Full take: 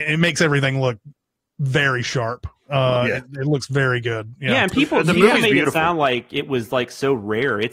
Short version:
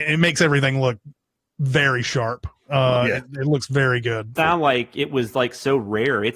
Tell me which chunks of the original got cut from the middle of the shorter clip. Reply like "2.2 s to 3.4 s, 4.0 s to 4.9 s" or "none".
4.4 s to 5.7 s